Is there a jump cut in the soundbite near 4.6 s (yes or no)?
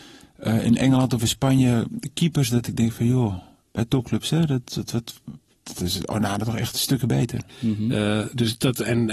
yes